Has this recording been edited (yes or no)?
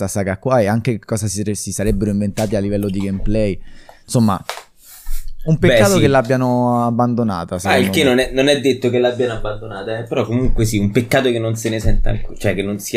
no